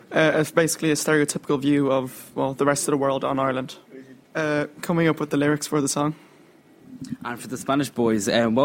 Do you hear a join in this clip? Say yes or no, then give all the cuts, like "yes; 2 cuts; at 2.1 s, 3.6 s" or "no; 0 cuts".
yes; 1 cut; at 4.3 s